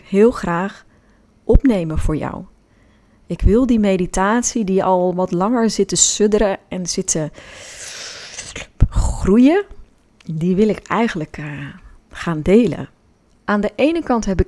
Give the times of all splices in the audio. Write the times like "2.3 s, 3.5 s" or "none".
13.3 s

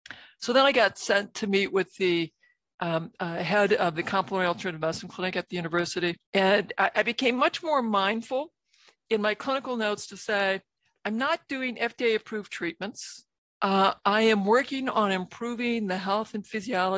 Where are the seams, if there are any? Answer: 6.3 s

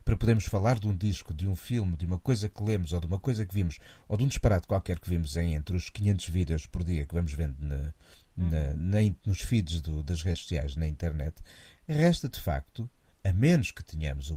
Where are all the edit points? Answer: none

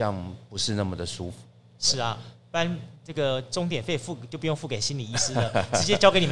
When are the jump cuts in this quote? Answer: none

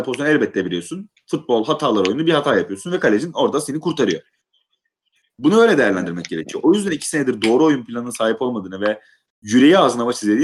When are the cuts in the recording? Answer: none

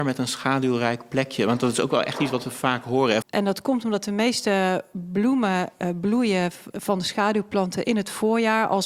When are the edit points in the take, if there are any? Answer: 3.2 s

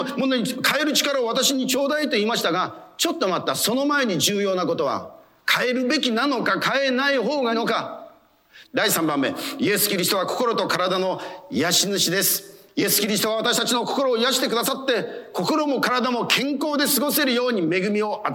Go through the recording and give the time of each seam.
7.5 s, 8.6 s

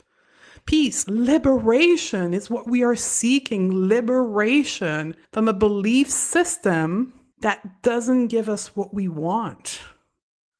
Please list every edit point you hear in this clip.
1.1 s, 5.2 s, 7.3 s

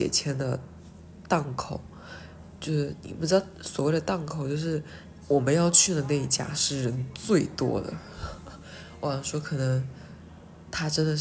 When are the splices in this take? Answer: 5.2 s

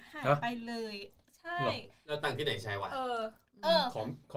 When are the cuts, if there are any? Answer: none

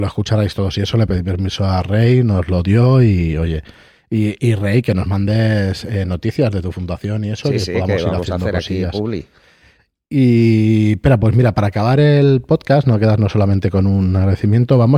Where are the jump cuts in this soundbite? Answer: none

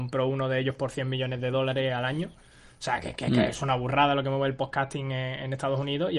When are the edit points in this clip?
none

